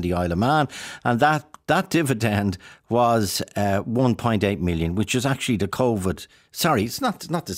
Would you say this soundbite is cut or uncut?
uncut